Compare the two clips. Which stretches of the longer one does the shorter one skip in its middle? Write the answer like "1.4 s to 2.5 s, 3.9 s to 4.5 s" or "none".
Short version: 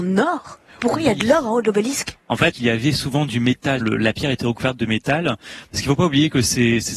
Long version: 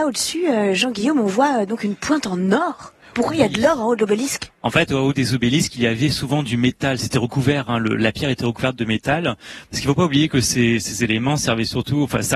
4.9 s to 5.7 s, 7.0 s to 7.8 s

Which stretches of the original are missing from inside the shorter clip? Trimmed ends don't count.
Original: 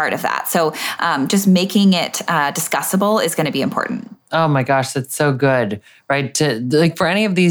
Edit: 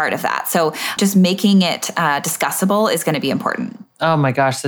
1.0 s to 1.3 s

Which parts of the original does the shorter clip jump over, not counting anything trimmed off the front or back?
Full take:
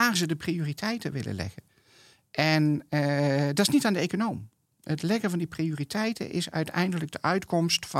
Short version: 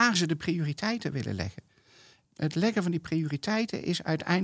2.2 s to 4.7 s

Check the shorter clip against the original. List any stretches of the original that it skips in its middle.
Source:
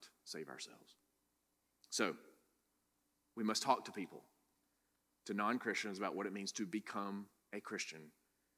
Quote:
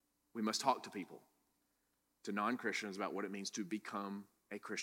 none

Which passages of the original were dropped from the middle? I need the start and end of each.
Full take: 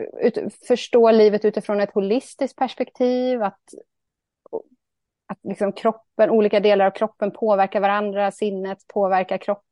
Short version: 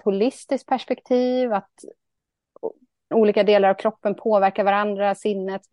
5.0 s to 6.3 s

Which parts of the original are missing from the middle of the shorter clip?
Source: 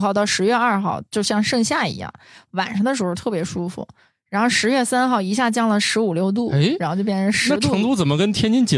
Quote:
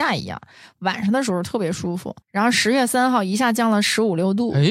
3.9 s to 4.2 s

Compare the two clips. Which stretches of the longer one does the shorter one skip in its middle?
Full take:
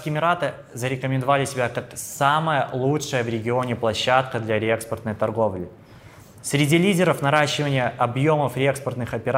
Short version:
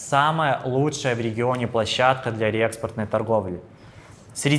none

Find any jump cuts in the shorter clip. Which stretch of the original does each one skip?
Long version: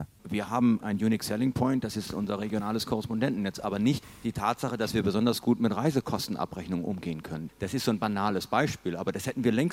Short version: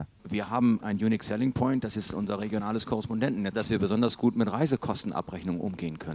3.5 s to 4.8 s

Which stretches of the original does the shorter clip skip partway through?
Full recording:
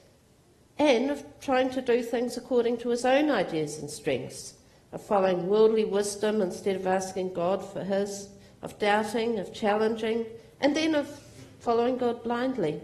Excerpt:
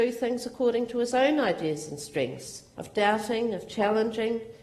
4.6 s to 8.6 s

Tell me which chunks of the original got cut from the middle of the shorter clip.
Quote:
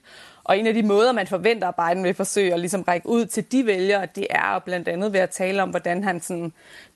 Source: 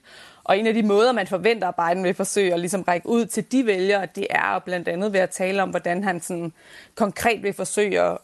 none

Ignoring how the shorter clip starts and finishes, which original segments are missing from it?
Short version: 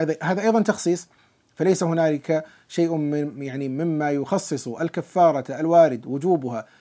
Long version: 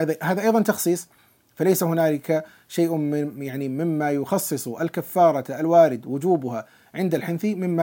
none

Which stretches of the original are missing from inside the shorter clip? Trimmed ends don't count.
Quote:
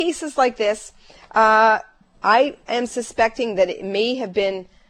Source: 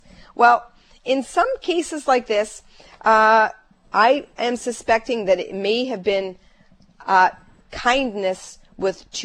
none

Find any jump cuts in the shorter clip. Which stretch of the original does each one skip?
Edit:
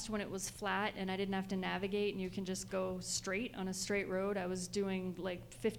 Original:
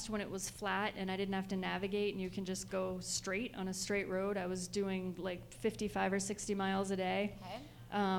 none

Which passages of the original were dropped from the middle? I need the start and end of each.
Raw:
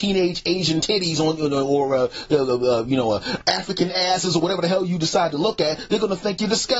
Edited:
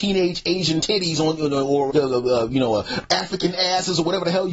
1.9 s to 2.3 s

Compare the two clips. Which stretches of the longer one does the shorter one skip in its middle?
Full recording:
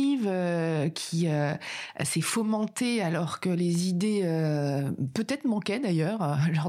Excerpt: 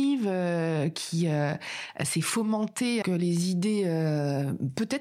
3.0 s to 3.4 s

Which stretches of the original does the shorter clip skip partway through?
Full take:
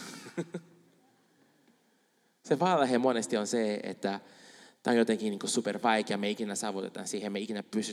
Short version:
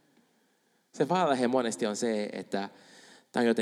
none

